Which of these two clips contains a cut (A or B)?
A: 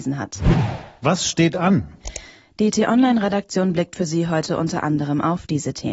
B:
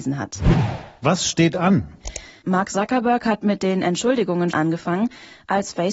B